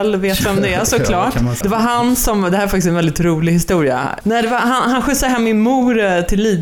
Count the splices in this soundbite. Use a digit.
2